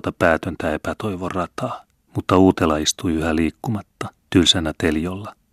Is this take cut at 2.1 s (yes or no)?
yes